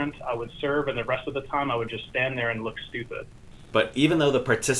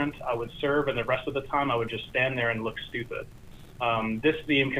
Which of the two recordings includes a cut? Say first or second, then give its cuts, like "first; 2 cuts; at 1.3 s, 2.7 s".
first; 1 cut; at 3.7 s